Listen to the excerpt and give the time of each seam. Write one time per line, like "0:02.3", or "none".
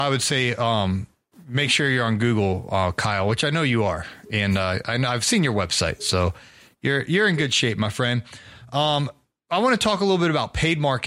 none